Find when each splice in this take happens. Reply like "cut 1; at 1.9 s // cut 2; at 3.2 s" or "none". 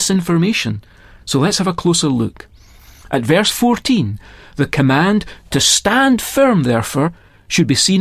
none